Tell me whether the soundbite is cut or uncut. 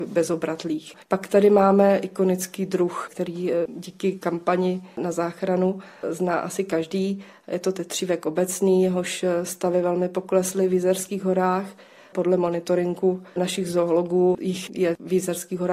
cut